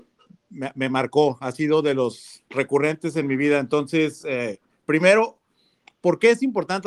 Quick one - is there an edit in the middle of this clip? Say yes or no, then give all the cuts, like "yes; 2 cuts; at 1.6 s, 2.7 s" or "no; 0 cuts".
no; 0 cuts